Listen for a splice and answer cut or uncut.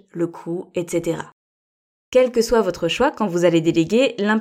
uncut